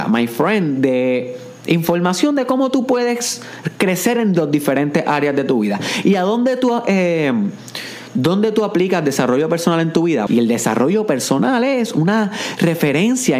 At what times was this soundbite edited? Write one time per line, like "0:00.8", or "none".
0:10.3

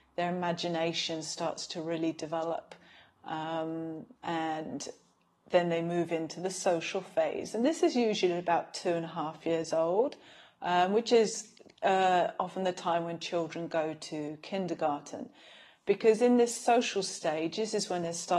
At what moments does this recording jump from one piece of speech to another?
none

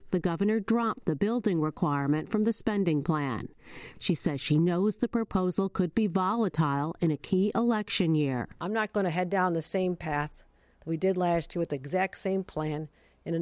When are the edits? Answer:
0:03.9

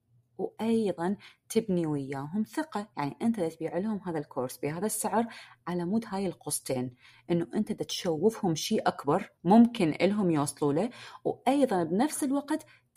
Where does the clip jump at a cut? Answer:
0:02.9
0:09.4

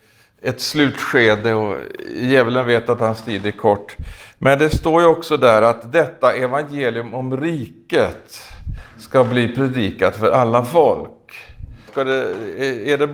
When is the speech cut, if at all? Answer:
0:11.9

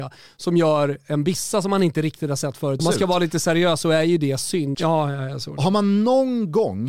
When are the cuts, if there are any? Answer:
0:02.8
0:04.7

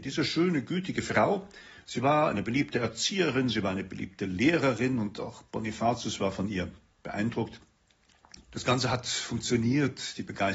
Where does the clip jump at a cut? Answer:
0:08.4

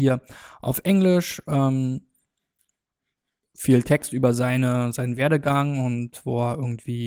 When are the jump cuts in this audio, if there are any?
none

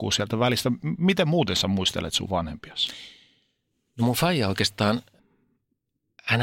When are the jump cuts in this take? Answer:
none

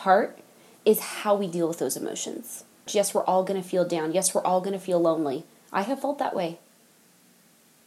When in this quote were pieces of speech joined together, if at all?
0:02.9

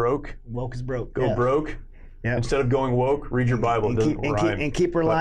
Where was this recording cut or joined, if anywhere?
0:01.1

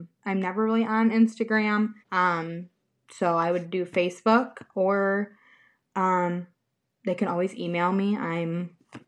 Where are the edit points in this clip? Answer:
0:02.0

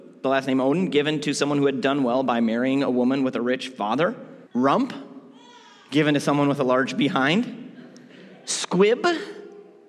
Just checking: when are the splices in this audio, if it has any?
0:04.4

